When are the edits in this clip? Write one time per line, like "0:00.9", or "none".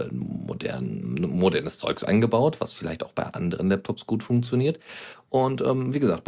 none